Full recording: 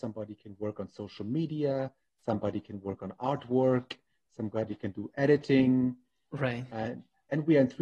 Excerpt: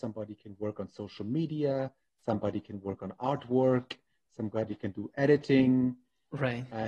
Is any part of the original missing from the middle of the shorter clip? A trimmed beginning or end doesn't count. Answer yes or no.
no